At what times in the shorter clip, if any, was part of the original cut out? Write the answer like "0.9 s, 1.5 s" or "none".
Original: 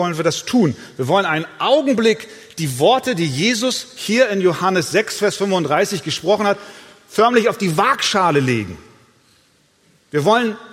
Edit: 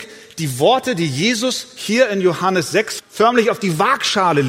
3.0 s